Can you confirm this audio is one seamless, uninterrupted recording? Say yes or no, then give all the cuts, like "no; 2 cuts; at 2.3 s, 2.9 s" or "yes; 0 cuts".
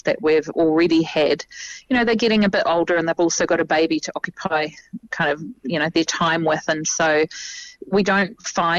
yes; 0 cuts